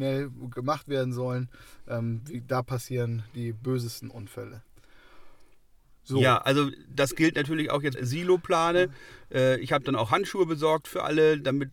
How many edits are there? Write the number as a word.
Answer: one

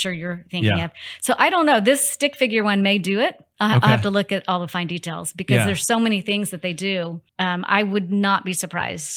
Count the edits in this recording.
one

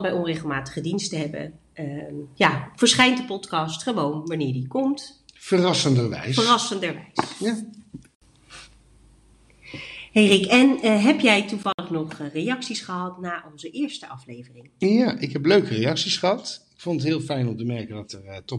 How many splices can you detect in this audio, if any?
zero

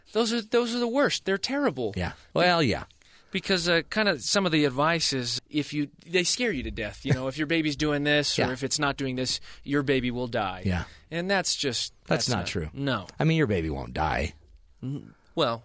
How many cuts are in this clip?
one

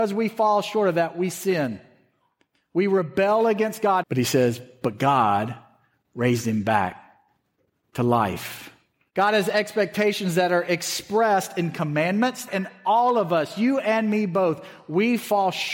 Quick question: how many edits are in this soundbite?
three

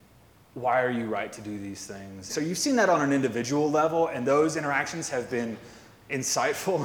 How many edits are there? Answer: one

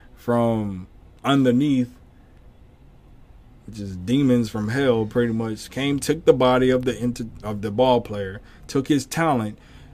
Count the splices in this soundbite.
zero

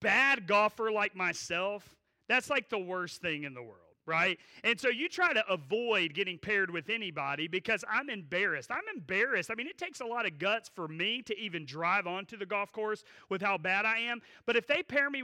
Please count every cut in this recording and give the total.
zero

